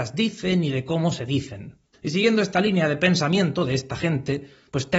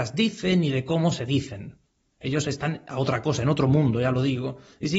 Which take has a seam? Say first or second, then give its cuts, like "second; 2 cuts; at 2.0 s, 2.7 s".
first; 1 cut; at 1.9 s